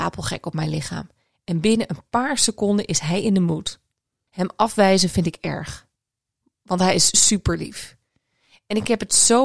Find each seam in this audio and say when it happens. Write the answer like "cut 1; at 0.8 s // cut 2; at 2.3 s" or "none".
none